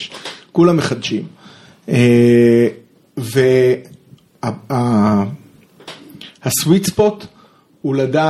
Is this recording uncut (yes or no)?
yes